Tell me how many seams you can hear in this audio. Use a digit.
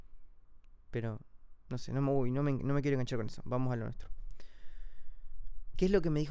0